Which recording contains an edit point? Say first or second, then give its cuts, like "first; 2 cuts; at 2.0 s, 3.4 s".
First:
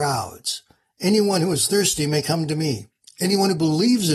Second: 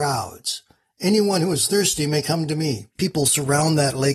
second; 1 cut; at 3.0 s